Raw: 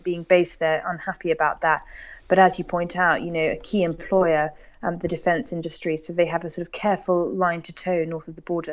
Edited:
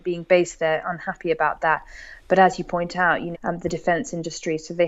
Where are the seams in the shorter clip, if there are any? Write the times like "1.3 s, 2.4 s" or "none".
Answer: 3.3 s